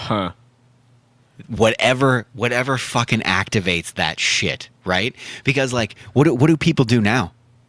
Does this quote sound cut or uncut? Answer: uncut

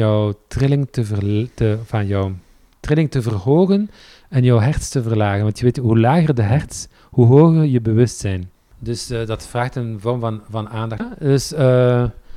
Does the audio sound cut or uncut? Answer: cut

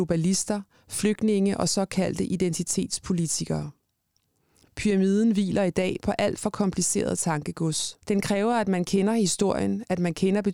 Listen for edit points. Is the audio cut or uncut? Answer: cut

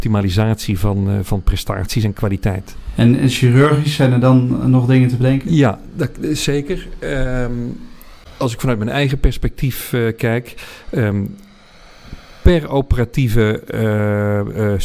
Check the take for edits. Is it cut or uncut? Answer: uncut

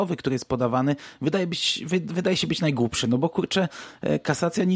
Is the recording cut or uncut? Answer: uncut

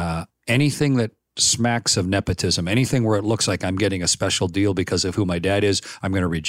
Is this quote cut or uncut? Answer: uncut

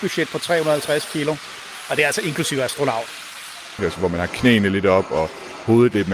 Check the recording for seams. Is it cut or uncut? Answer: cut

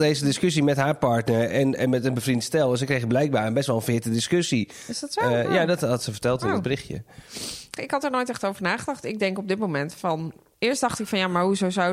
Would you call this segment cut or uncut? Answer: cut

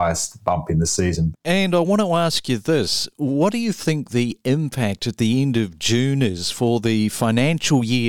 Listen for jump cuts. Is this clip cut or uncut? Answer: cut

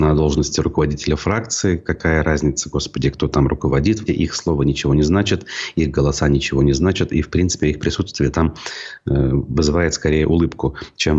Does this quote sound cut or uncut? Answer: cut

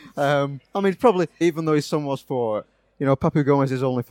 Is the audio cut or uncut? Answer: cut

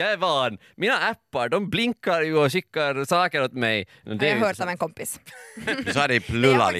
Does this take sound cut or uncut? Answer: cut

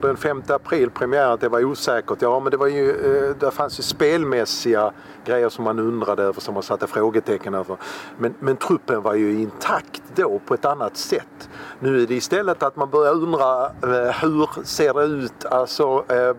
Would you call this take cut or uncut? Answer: uncut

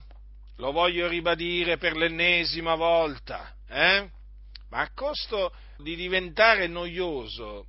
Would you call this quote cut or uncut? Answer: cut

